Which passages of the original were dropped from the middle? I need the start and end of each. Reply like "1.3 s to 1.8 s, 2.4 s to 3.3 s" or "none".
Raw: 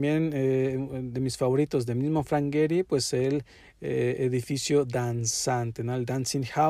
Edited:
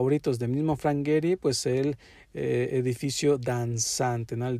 none